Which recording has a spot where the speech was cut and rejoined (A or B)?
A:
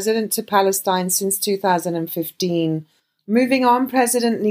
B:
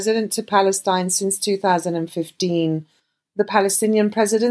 A